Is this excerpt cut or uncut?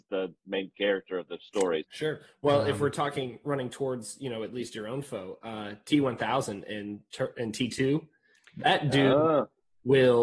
cut